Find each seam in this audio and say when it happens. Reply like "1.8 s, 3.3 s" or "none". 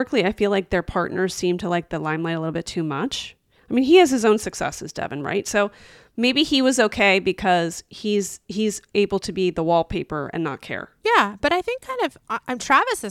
none